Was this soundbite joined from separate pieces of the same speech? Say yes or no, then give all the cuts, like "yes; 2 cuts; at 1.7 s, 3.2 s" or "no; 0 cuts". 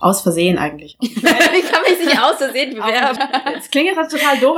yes; 1 cut; at 3.2 s